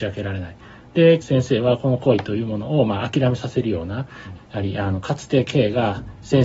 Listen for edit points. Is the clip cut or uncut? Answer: cut